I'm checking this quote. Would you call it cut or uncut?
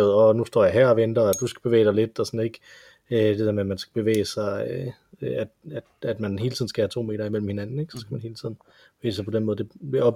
uncut